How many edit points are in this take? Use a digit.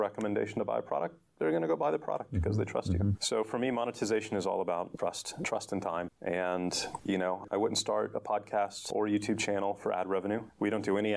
0